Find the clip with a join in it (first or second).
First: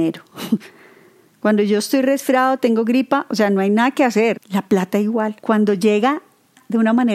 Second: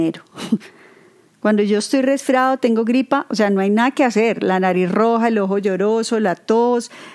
first